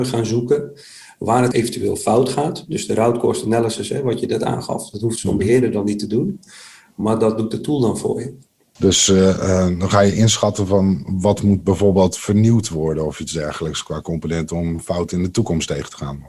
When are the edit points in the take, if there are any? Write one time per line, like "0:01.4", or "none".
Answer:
0:01.5
0:08.8